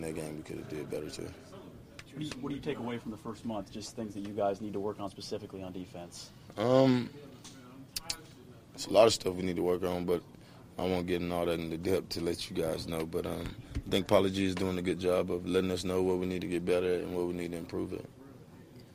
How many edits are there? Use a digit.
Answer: 0